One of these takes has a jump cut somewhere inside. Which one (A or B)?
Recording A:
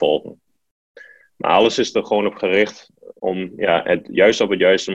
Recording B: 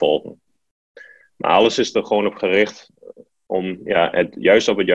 A